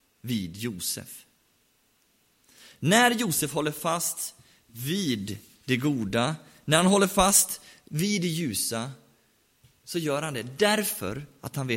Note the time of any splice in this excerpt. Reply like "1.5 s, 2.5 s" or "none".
none